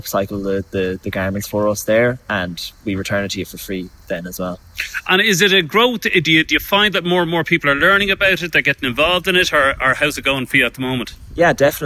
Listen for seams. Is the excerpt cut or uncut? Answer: uncut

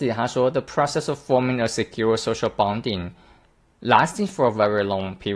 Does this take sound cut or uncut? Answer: uncut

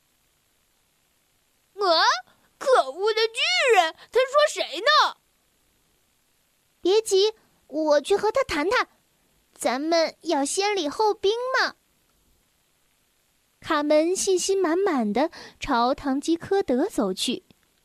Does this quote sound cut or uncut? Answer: uncut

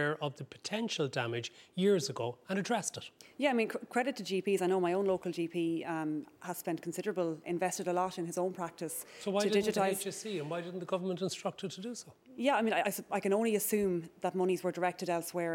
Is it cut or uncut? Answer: cut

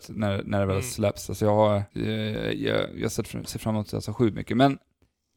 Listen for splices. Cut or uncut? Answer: uncut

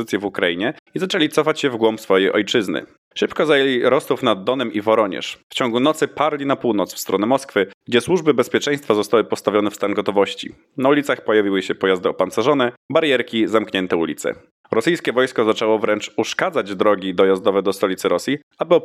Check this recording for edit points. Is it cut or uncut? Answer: uncut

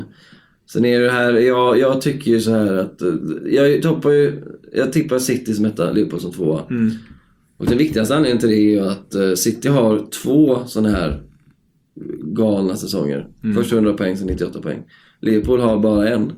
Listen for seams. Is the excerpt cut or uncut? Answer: uncut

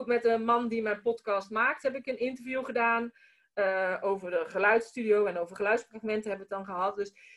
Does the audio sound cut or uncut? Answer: uncut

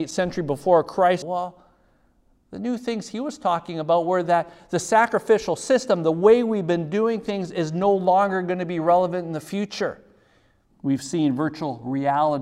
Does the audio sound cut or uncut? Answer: cut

